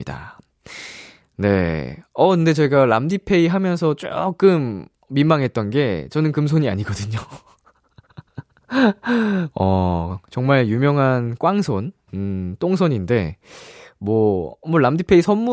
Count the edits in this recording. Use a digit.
0